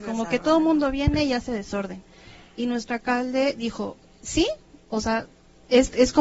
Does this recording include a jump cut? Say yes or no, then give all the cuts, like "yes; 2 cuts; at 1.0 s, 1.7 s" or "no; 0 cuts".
no; 0 cuts